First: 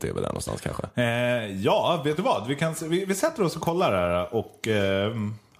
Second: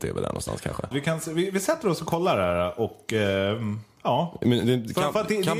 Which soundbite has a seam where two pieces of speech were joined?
second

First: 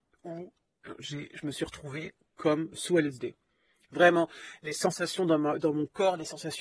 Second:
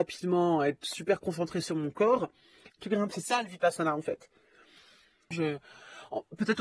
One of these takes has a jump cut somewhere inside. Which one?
second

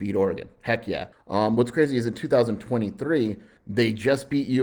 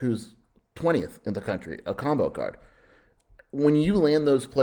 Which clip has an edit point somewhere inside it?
first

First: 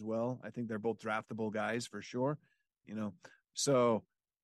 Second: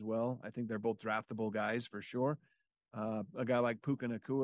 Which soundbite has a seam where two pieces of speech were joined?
first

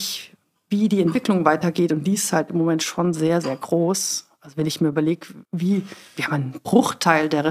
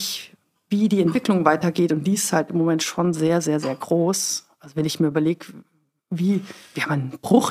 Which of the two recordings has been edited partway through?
first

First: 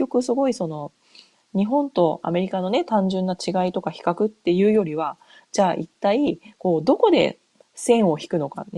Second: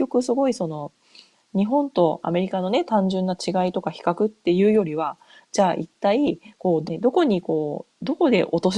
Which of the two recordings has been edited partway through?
second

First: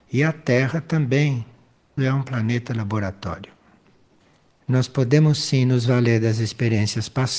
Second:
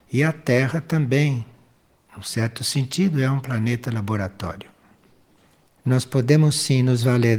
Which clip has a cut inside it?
first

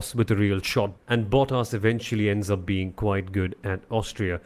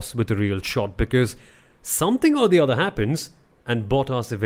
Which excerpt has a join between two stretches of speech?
first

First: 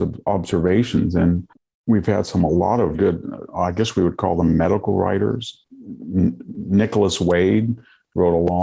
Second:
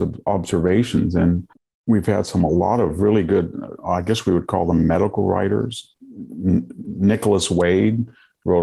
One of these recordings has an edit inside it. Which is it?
first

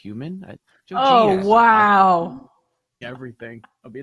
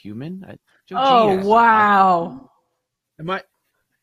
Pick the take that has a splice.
first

